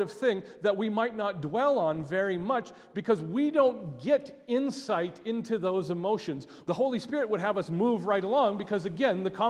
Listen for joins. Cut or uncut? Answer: cut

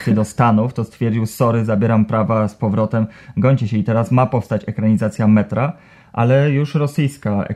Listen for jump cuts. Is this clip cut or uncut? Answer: uncut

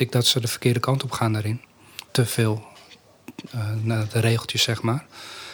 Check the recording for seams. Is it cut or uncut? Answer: cut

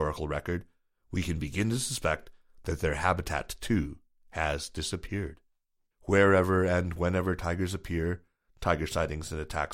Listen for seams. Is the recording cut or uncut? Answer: cut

